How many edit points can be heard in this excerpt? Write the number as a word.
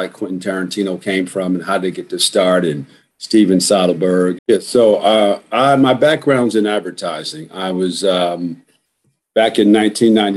one